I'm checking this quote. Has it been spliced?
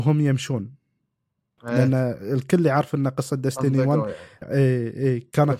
yes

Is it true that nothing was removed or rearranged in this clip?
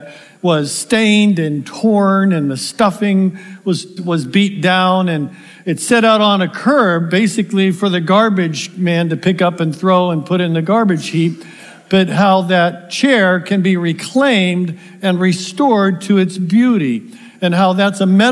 no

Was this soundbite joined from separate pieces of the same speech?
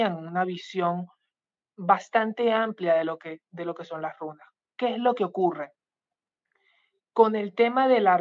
no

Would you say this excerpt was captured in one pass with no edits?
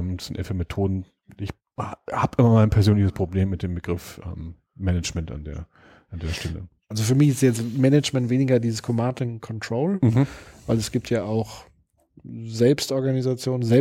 yes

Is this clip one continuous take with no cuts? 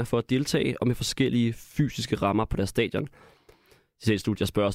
yes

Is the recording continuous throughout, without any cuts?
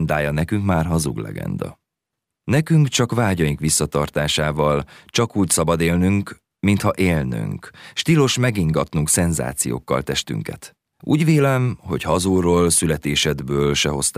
no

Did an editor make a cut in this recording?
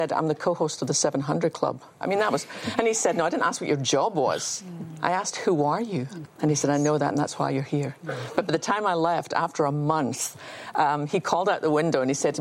yes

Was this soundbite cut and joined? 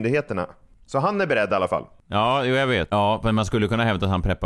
yes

